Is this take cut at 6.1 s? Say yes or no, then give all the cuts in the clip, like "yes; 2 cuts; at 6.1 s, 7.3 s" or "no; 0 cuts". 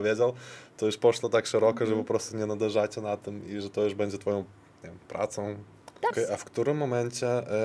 yes; 1 cut; at 6.1 s